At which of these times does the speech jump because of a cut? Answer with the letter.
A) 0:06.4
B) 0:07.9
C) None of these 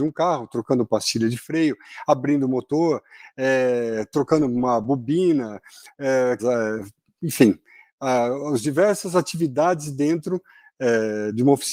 A